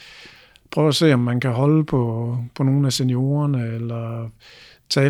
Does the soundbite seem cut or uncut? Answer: uncut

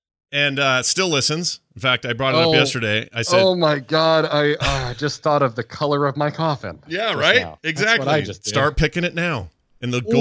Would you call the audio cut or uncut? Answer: uncut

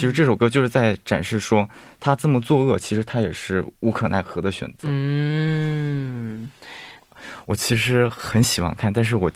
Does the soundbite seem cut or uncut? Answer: cut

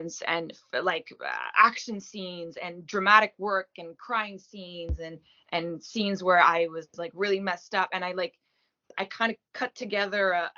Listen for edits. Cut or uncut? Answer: uncut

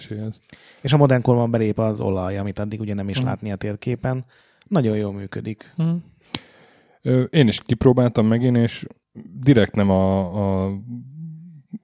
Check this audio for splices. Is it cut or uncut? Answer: uncut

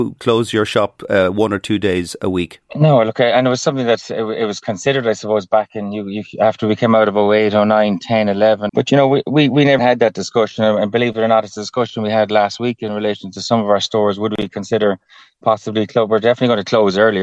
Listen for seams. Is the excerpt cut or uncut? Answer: cut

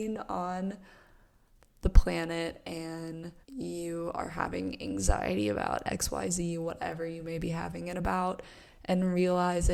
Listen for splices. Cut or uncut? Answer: cut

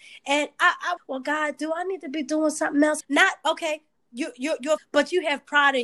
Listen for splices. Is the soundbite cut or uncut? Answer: cut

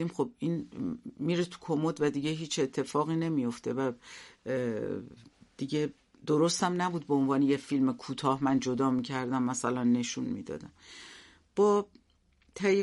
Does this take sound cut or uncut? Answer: uncut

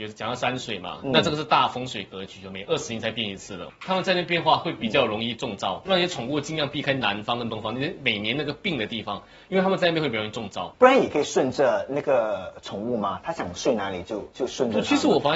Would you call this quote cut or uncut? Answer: cut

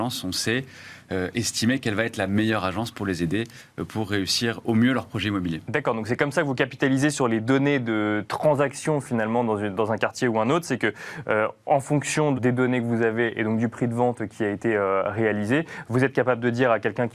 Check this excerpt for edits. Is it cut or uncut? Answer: cut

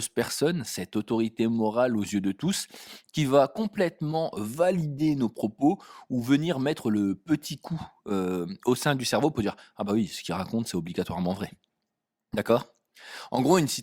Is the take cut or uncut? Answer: uncut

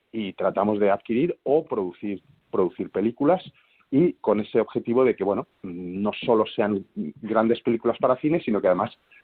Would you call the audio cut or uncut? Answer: uncut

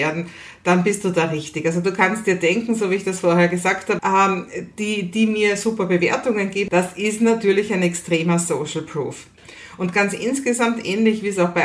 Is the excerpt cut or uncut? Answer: cut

